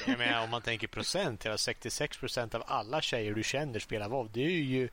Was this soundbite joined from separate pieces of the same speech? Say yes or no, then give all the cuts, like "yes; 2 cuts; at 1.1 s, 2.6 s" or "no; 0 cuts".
no; 0 cuts